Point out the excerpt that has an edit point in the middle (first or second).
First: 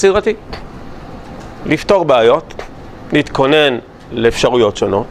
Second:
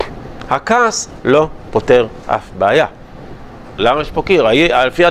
second